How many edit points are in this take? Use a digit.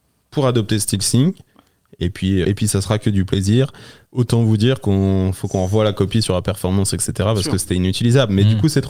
2